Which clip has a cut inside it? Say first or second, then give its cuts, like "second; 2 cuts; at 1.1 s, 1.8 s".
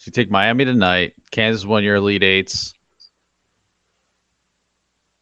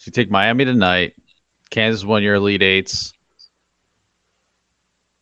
first; 1 cut; at 1.2 s